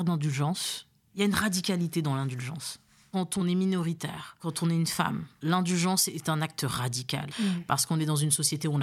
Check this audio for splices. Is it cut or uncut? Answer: cut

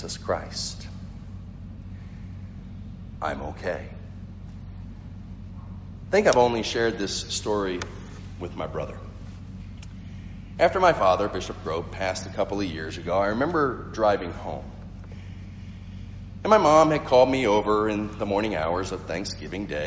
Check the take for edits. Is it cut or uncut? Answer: cut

